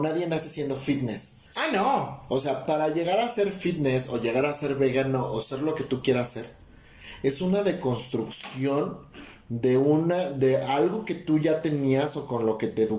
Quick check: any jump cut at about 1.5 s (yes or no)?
yes